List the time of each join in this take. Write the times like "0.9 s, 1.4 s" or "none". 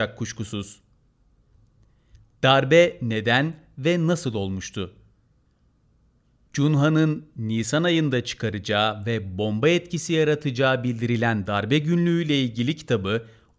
6.5 s

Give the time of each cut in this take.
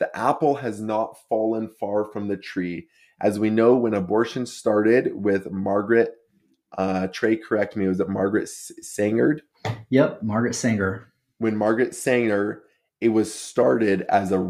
none

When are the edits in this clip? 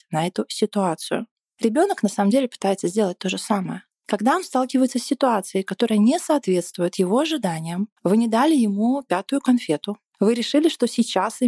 8.0 s, 10.1 s

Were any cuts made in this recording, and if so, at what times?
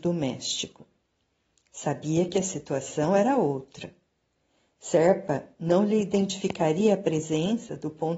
none

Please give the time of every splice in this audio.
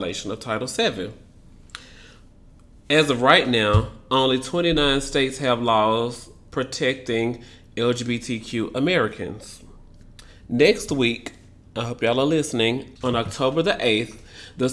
13.0 s

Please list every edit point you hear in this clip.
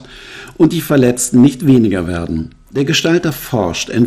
none

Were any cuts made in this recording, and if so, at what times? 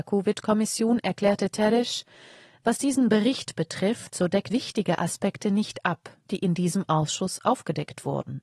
4.5 s

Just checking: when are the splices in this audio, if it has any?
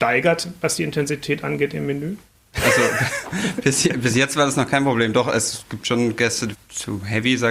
2.4 s, 6.5 s

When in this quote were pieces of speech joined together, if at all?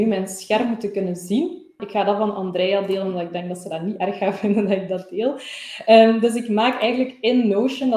1.8 s

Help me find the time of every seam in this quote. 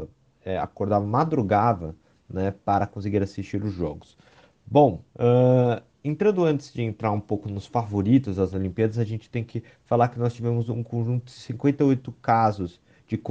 5.1 s

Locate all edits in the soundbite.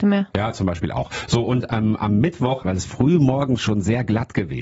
2.6 s

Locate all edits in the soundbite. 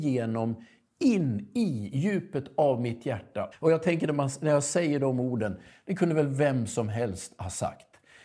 3.5 s

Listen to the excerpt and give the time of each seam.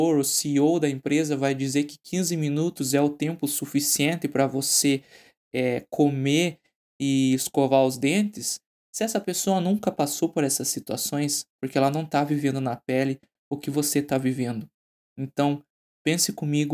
11.5 s

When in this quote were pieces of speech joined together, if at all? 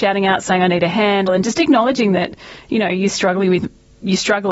1.3 s

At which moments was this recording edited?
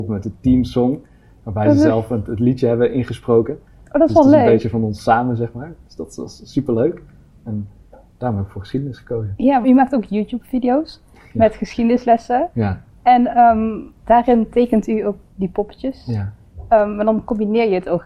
7.5 s, 9.6 s

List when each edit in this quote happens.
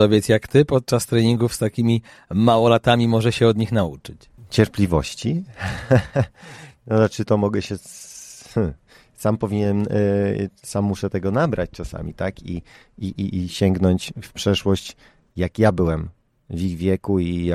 none

